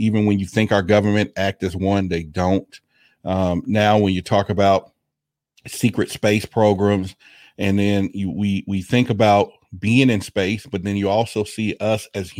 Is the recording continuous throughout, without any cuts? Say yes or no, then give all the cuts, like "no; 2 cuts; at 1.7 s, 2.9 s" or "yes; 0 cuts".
yes; 0 cuts